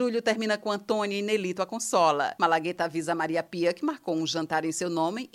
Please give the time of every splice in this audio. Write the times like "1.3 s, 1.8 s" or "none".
2.4 s